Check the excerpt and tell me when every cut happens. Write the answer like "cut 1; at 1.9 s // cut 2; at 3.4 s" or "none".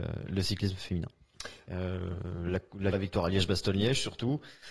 cut 1; at 1.6 s // cut 2; at 2.9 s